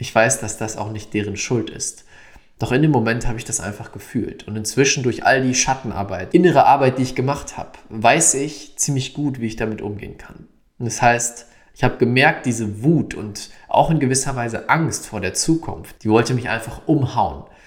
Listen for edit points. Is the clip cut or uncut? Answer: cut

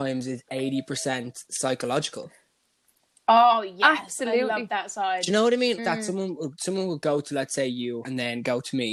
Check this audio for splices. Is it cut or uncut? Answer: cut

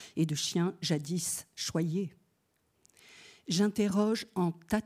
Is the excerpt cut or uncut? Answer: uncut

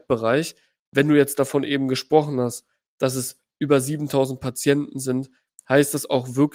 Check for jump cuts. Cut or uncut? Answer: uncut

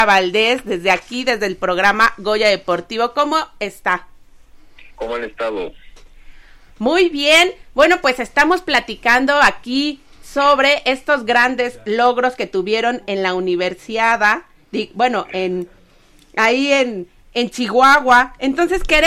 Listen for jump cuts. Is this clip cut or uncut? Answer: cut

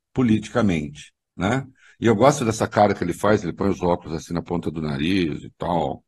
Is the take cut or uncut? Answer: uncut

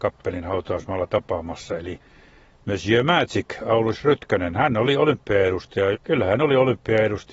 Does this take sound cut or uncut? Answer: cut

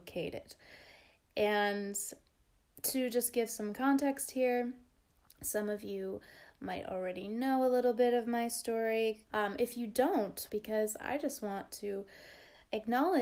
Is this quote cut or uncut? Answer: cut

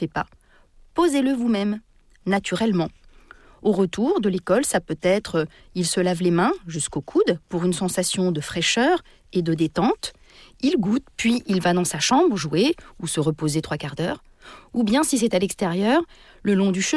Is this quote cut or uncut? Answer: uncut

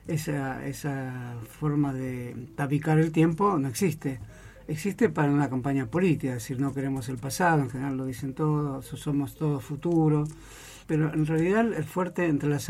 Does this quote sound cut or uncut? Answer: cut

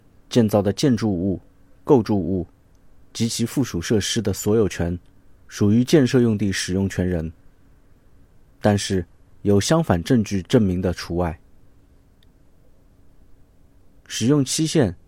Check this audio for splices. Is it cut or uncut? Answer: cut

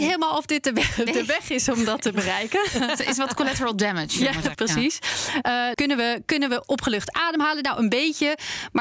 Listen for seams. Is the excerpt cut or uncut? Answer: cut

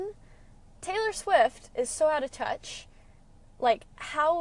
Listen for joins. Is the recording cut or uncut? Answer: uncut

